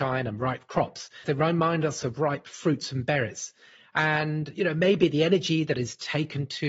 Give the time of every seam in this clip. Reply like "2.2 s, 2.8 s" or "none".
1.2 s